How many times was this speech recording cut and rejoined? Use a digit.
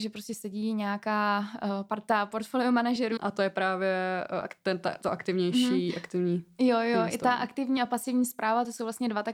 1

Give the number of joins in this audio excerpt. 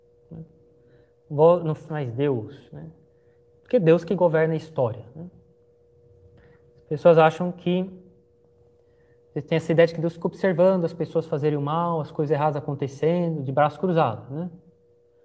1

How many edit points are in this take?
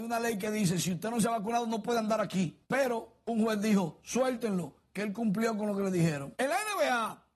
2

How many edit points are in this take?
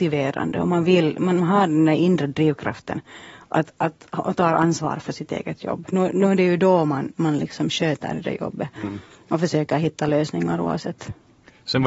0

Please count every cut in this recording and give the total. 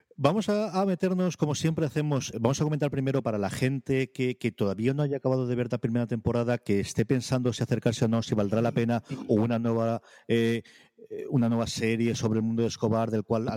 1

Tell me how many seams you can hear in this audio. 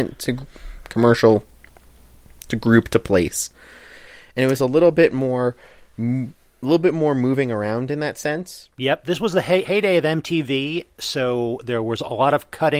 0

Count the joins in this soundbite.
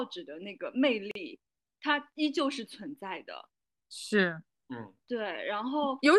0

